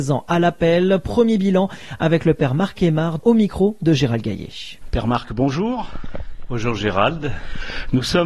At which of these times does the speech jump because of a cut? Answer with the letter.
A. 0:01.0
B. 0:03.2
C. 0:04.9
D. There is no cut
B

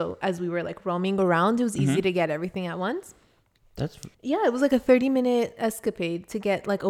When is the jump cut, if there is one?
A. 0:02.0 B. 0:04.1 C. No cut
B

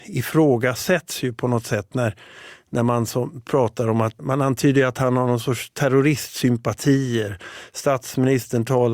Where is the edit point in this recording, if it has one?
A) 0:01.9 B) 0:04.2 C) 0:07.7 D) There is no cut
B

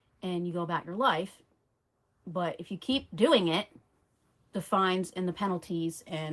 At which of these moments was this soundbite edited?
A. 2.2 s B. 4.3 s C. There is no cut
C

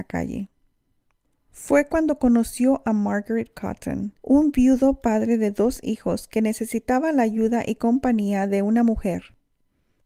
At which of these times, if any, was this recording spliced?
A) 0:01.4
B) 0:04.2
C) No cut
B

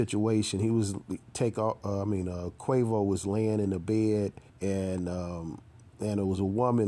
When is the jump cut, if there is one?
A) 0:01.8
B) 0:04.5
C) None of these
B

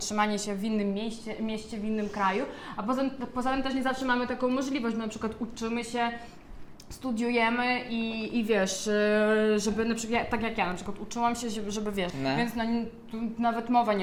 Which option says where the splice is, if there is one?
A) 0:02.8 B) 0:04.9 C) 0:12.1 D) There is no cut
C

